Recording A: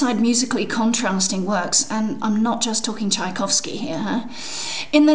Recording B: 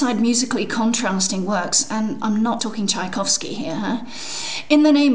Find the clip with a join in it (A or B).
B